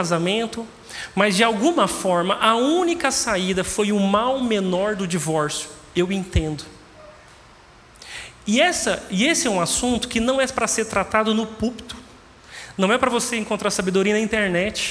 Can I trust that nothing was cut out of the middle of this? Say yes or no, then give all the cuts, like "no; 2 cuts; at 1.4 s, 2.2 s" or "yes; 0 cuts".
yes; 0 cuts